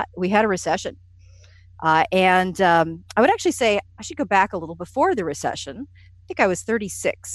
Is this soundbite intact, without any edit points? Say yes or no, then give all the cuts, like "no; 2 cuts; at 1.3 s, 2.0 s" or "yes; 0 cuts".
yes; 0 cuts